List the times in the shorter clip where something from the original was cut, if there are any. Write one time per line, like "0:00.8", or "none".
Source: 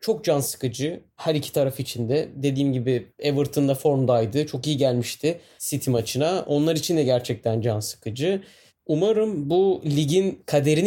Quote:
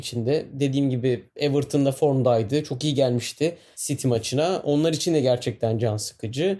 none